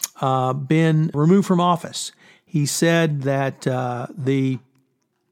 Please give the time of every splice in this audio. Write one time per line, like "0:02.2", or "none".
0:01.1